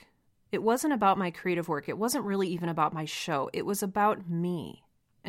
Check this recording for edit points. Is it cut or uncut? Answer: uncut